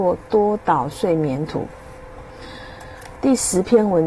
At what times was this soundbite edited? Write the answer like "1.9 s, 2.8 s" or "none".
none

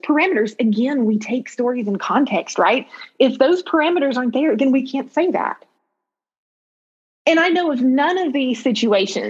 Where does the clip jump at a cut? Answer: none

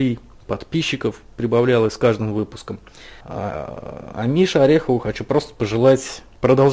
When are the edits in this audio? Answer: 3.2 s

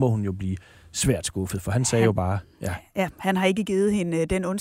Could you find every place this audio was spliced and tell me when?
none

